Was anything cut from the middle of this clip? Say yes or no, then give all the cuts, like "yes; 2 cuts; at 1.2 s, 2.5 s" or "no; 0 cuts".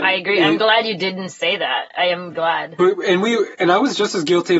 yes; 1 cut; at 2.3 s